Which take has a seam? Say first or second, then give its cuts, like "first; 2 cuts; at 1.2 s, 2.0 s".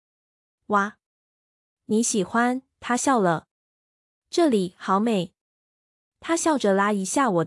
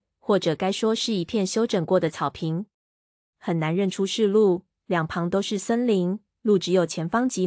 second; 1 cut; at 3.3 s